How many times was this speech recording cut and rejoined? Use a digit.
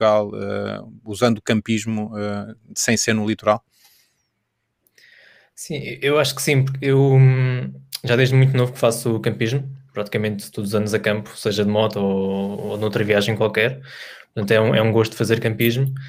0